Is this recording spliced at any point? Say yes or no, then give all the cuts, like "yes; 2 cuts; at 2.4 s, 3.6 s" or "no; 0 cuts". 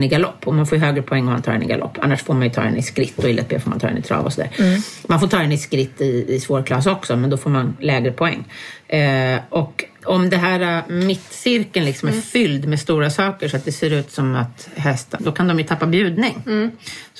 yes; 2 cuts; at 10.0 s, 15.2 s